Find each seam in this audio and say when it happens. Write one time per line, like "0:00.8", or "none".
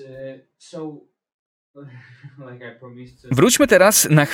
none